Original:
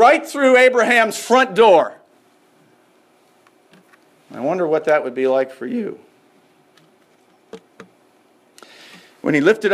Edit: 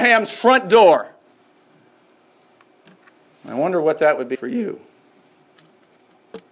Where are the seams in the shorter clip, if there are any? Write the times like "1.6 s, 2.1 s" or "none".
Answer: 4.3 s